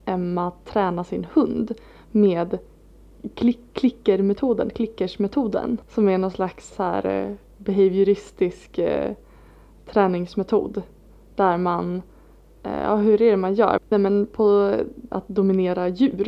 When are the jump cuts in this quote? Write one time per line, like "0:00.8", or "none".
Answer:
0:06.7
0:13.8
0:15.1